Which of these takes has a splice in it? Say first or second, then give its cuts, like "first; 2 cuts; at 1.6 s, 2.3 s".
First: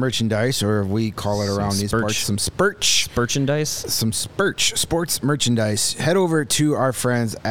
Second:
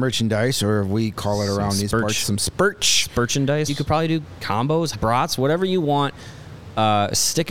second; 2 cuts; at 3.7 s, 4.9 s